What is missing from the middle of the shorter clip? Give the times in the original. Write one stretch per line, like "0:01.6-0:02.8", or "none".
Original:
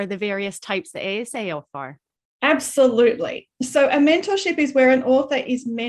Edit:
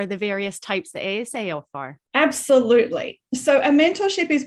0:02.1-0:02.3

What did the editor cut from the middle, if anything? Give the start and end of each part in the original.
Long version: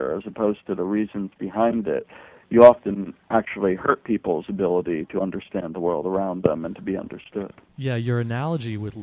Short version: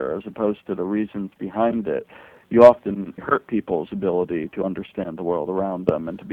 0:03.2-0:03.7

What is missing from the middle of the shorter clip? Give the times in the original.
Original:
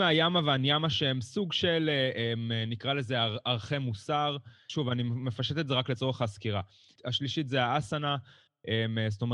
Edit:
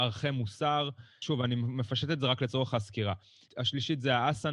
none

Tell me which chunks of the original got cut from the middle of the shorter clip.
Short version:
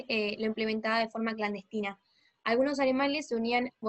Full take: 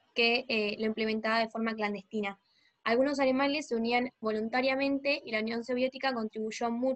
none

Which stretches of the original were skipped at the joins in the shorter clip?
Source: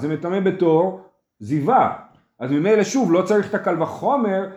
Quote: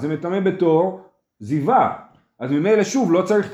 none

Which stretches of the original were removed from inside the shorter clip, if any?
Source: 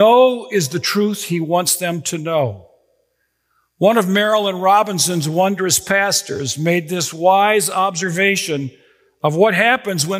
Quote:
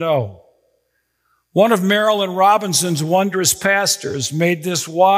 none

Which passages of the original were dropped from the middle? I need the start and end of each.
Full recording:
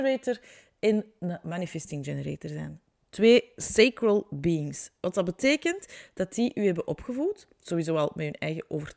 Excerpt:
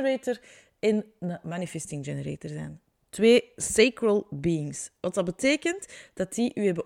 none

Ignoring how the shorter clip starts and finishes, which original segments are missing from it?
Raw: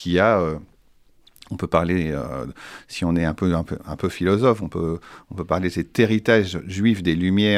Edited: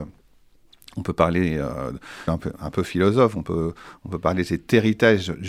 0:02.8-0:03.5

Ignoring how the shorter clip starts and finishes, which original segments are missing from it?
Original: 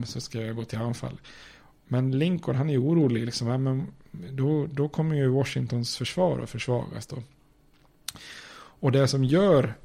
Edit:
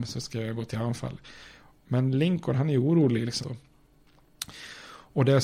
0:03.4-0:07.1

